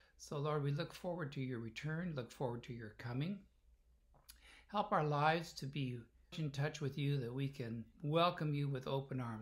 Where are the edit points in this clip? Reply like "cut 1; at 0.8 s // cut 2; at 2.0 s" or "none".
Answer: cut 1; at 6.3 s // cut 2; at 7.9 s